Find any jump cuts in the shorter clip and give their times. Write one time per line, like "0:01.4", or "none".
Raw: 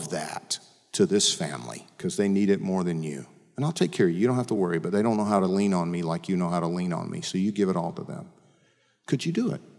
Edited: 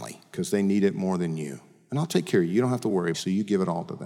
0:03.1